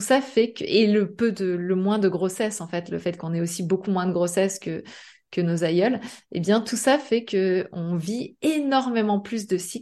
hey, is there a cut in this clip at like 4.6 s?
no; 0 cuts

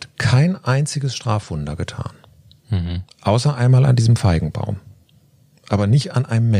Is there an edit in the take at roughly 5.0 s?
no; 0 cuts

